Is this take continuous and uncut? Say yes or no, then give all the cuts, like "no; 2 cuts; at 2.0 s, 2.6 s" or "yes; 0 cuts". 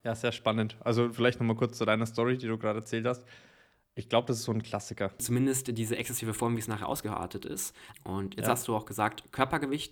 no; 2 cuts; at 5.2 s, 7.9 s